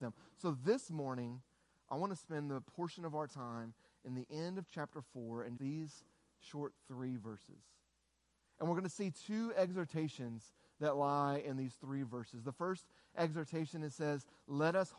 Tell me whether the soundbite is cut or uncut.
cut